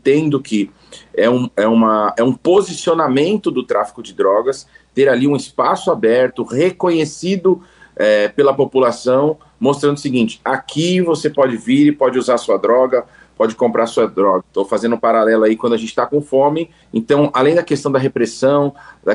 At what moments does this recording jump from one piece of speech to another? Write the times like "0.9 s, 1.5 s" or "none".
14.4 s, 16.8 s